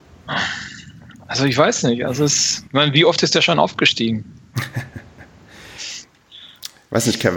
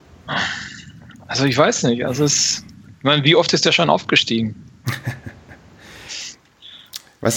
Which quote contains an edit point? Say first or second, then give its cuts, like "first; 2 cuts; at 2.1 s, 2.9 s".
first; 1 cut; at 2.7 s